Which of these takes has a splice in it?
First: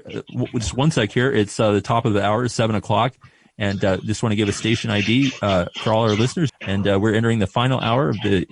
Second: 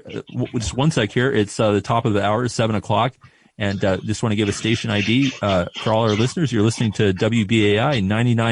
first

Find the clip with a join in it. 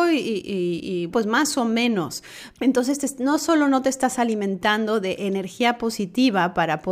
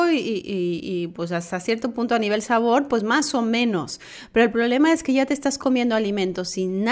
first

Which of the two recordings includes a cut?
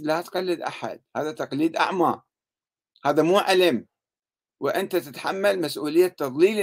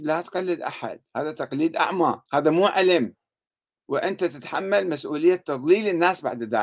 second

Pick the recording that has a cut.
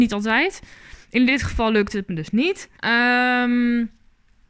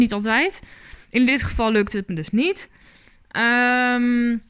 first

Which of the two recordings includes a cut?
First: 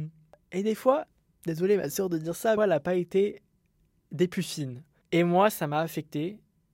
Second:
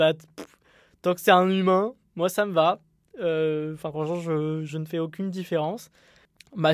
first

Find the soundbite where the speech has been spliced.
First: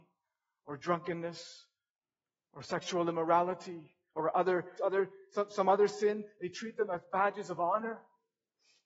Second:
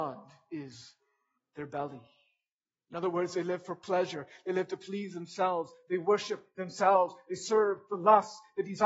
first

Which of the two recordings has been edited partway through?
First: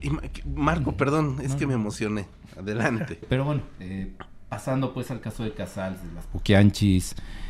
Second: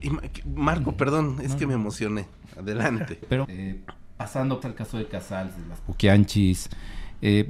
second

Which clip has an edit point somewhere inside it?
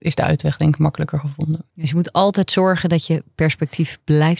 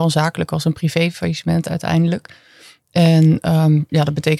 first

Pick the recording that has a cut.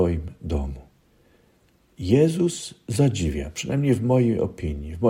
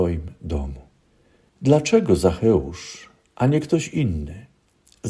second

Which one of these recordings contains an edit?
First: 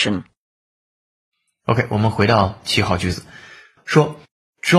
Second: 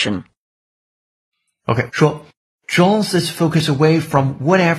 second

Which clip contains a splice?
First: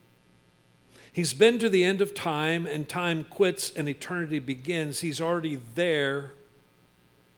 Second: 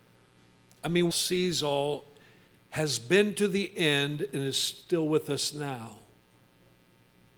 second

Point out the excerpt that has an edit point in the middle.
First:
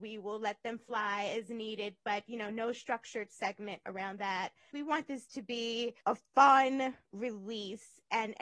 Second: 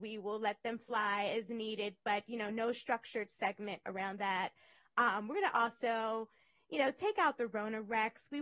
first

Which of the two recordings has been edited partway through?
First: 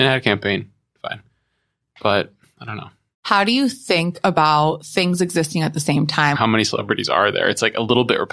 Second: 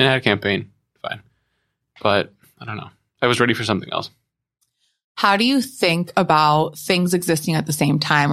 first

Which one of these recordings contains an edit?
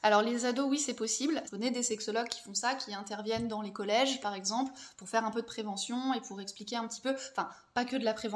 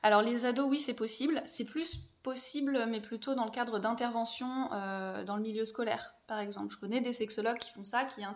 first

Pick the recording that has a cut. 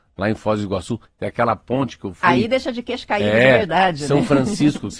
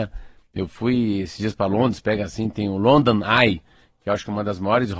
first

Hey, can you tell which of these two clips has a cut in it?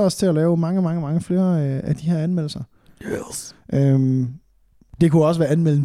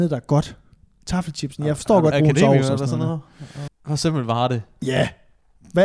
second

